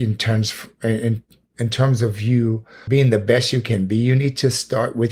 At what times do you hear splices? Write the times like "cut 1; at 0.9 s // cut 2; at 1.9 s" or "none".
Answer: cut 1; at 2.9 s